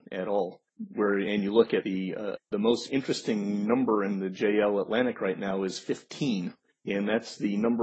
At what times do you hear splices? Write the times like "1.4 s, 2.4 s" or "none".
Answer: 2.4 s

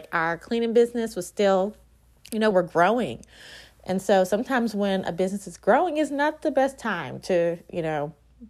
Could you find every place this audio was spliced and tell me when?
2.5 s

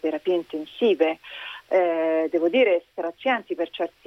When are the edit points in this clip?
none

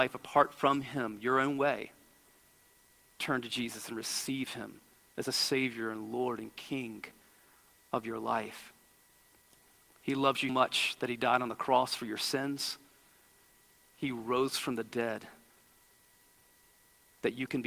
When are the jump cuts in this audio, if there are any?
10.5 s

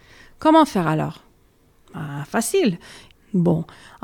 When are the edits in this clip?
3.1 s

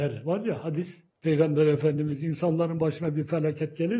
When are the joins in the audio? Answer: none

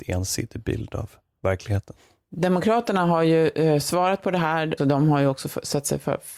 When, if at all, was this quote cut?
4.8 s

